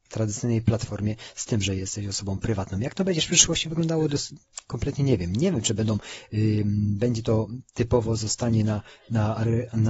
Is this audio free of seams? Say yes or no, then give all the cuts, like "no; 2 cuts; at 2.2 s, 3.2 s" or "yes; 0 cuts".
yes; 0 cuts